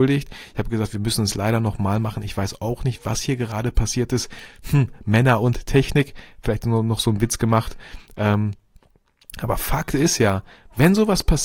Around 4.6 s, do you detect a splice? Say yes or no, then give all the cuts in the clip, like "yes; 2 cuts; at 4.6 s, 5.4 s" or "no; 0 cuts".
no; 0 cuts